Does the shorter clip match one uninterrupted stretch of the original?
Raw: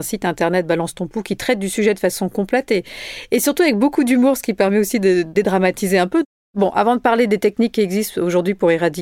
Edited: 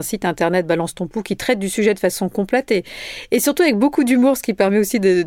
yes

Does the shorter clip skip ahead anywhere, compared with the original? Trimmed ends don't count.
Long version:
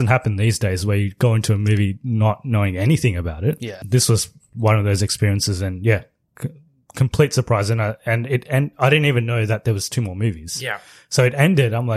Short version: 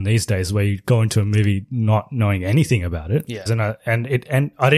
yes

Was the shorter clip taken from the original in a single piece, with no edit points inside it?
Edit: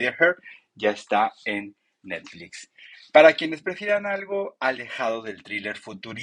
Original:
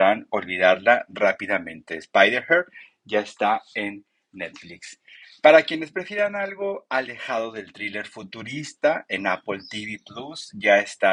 yes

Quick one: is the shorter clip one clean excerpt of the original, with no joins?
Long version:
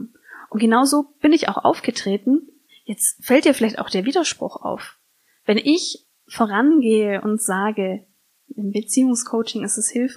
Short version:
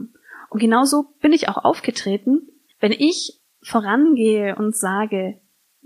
no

